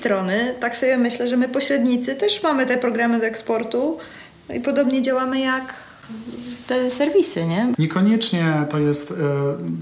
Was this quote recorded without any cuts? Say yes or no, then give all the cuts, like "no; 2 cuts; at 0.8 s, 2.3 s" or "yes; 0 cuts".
no; 1 cut; at 7.7 s